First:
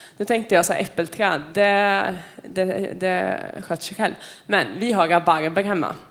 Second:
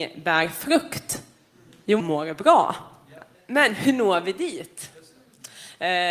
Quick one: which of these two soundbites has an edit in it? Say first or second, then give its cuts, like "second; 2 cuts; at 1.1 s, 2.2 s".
second; 2 cuts; at 2.0 s, 3.3 s